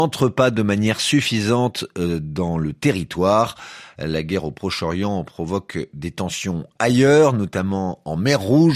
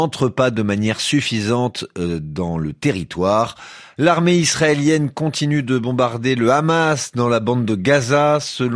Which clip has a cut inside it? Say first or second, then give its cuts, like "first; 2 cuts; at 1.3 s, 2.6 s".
second; 1 cut; at 4.0 s